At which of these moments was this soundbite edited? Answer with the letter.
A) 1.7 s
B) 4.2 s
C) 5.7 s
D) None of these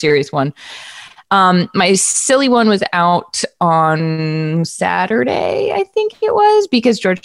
D